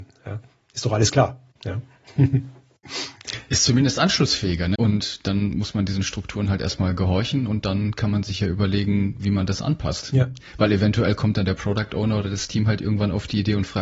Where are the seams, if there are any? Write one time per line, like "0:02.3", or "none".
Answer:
0:04.7

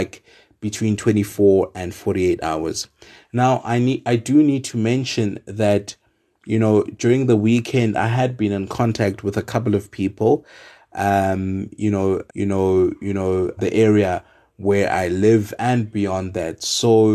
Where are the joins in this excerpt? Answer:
0:12.3
0:13.6

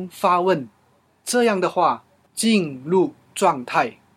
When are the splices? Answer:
0:02.2

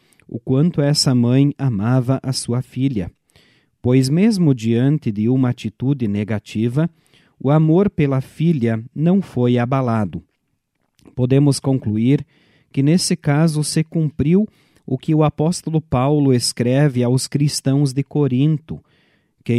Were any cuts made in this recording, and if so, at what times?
none

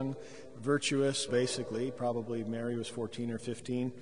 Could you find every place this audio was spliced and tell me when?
0:01.3

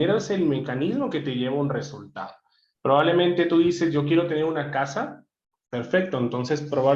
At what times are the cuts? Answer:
none

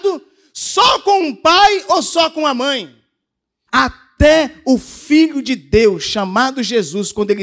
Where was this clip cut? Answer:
0:03.7

